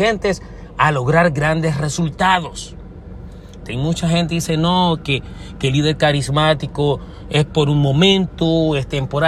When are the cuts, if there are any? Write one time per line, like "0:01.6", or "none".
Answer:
0:03.7